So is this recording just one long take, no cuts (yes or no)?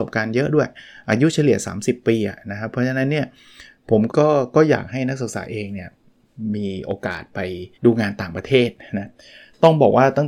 no